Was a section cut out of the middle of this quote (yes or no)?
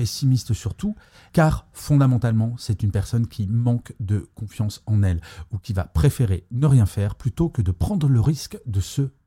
yes